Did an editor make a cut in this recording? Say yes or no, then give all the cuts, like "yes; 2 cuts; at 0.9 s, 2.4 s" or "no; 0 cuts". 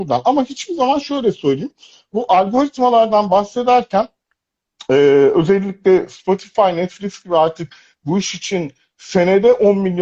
no; 0 cuts